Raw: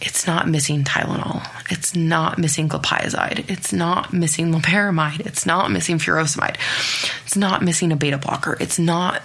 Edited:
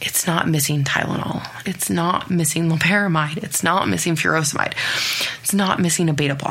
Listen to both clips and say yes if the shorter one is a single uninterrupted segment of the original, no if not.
no